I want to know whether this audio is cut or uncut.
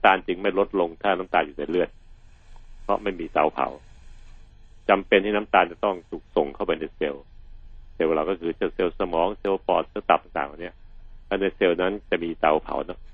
uncut